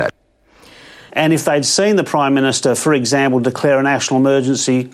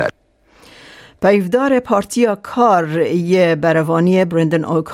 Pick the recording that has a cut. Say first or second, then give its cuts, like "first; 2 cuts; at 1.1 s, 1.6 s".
first; 1 cut; at 1.1 s